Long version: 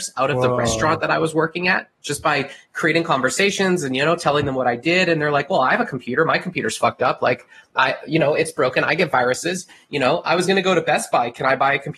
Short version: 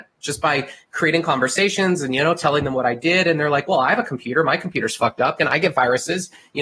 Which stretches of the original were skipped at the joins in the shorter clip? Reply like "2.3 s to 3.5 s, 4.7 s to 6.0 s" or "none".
7.2 s to 8.7 s